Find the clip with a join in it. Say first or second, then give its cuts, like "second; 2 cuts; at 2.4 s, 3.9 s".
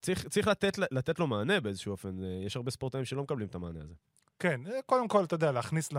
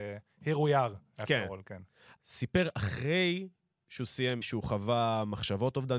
second; 2 cuts; at 2.2 s, 4.4 s